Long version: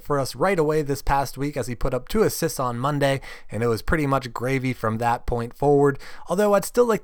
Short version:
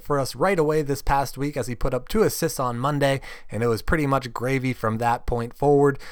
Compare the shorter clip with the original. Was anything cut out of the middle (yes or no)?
no